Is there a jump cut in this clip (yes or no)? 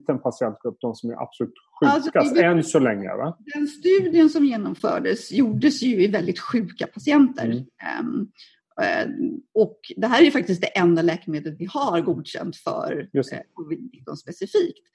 no